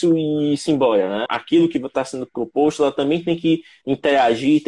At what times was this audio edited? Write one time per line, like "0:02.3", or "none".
0:01.3